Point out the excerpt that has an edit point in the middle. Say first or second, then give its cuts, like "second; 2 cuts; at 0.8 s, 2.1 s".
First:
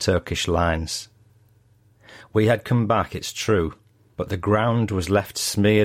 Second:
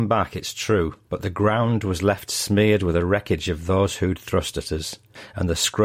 second; 1 cut; at 1.0 s